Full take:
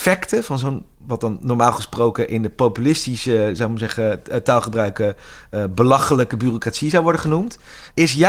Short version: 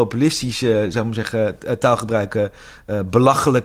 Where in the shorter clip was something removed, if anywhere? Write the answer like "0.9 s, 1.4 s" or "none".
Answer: none